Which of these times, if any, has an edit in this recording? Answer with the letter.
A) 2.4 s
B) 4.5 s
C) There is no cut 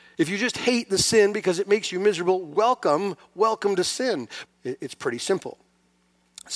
B